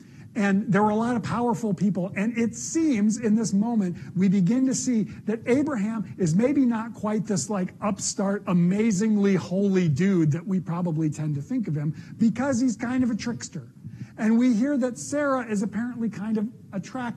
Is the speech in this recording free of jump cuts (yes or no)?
yes